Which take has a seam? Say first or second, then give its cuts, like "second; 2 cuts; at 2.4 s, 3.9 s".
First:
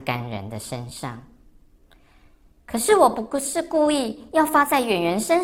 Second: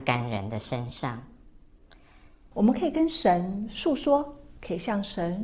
second; 1 cut; at 2.5 s